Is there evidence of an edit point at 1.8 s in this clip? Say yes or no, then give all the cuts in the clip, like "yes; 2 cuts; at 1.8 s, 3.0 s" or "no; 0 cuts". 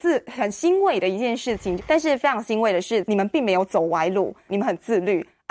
yes; 3 cuts; at 1.8 s, 3.0 s, 4.5 s